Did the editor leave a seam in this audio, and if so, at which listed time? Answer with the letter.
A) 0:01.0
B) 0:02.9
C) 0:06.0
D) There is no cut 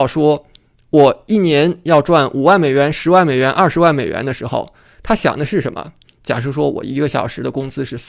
C